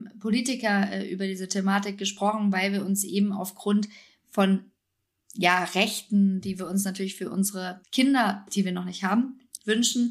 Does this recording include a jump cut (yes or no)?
yes